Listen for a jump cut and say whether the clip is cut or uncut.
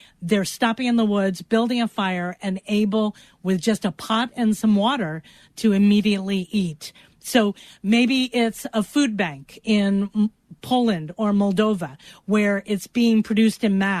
uncut